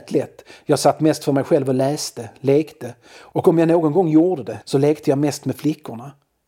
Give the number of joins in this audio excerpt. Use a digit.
1